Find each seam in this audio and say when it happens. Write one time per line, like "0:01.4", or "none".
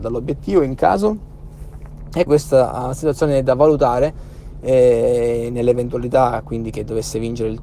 0:02.3

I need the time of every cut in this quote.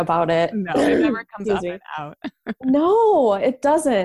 none

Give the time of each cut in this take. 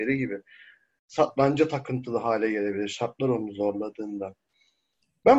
none

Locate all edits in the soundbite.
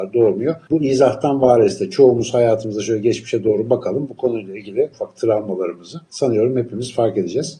0:04.9

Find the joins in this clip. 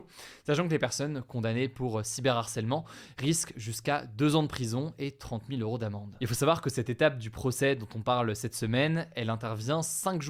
none

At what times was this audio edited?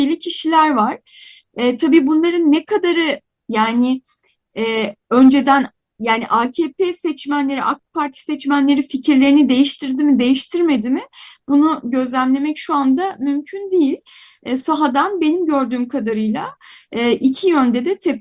none

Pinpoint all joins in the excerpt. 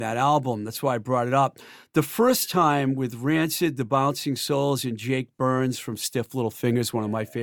none

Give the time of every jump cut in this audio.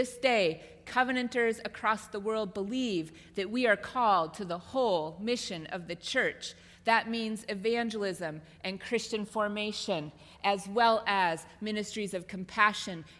none

